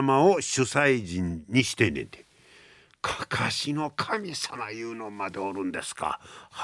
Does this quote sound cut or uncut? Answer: uncut